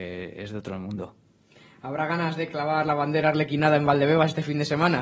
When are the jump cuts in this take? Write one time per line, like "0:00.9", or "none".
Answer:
none